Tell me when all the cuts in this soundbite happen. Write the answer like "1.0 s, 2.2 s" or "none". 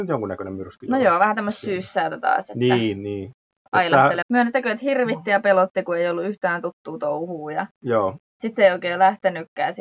4.2 s